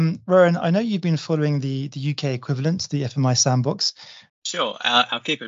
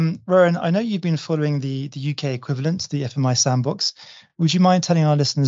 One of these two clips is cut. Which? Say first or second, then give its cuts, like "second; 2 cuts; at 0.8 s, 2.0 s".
first; 1 cut; at 4.3 s